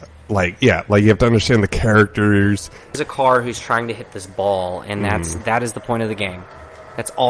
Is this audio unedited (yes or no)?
no